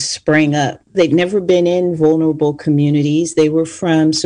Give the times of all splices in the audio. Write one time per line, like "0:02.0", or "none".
0:00.9